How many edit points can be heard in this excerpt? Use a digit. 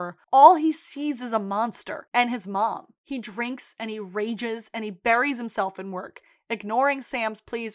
1